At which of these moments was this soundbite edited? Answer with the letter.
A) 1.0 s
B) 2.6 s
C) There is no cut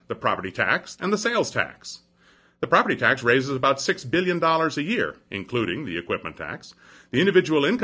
A